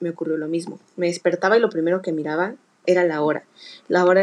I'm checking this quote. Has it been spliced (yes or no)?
yes